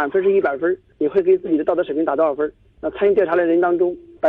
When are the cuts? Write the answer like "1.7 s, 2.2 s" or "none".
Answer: none

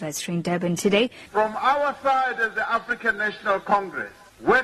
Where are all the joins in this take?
1.3 s

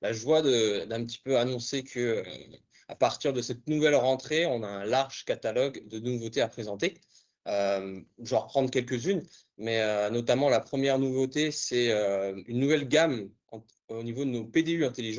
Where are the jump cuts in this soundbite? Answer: none

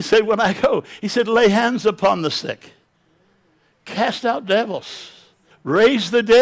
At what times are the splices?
5.5 s

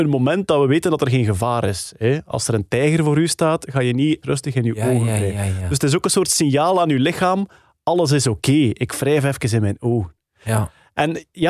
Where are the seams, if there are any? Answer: 4.2 s

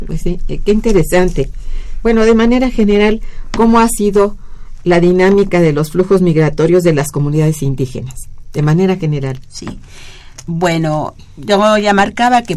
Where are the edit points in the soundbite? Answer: none

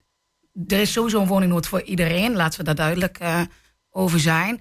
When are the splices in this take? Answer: none

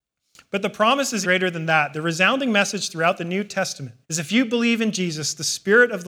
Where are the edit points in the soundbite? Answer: 1.2 s, 4.0 s

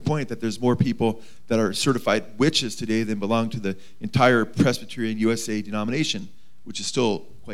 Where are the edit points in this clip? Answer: none

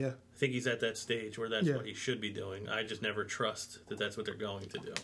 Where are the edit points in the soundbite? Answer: none

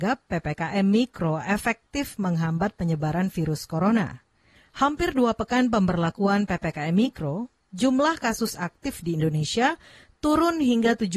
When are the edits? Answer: none

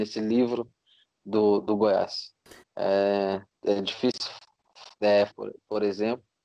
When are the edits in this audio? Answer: 2.6 s, 5.3 s

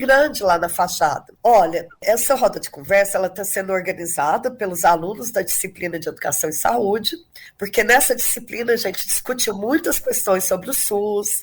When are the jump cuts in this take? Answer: 1.4 s

